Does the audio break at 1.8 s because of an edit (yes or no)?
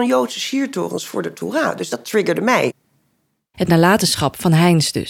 no